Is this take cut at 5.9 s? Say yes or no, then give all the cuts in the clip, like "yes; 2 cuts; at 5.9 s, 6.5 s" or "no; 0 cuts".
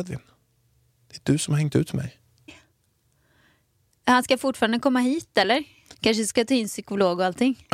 yes; 2 cuts; at 2.5 s, 5.9 s